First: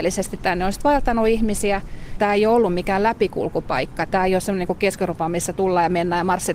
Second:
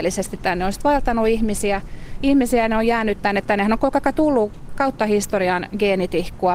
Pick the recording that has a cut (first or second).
first